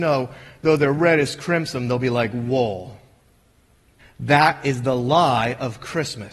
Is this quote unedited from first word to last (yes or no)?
no